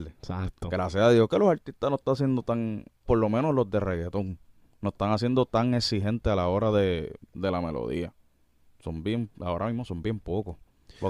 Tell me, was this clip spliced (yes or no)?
yes